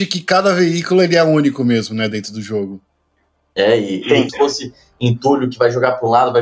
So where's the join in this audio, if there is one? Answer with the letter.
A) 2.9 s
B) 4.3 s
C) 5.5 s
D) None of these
B